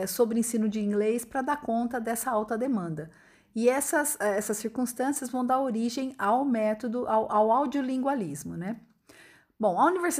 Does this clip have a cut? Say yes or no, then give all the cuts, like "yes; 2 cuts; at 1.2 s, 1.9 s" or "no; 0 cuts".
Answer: no; 0 cuts